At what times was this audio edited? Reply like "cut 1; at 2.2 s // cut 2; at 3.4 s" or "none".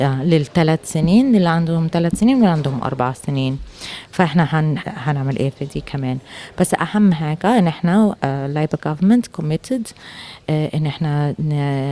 cut 1; at 4.8 s